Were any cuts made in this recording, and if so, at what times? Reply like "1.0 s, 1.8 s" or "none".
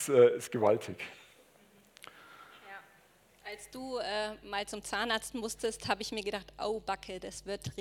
none